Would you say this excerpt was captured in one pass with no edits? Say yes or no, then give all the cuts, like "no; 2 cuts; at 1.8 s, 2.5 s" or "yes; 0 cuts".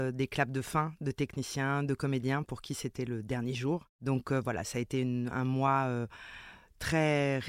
yes; 0 cuts